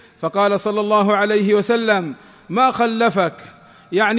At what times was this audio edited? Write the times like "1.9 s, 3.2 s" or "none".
none